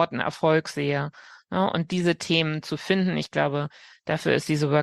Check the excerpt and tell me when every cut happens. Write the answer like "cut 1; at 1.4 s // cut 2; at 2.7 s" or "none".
none